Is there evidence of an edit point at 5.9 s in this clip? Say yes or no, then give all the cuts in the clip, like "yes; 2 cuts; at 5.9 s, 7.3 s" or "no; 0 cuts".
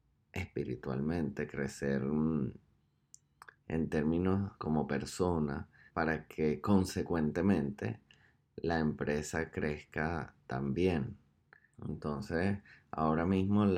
yes; 3 cuts; at 4.6 s, 5.9 s, 11.7 s